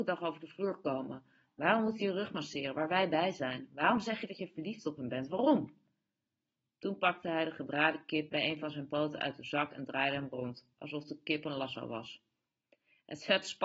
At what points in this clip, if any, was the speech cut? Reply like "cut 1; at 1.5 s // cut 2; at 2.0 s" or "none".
cut 1; at 8.3 s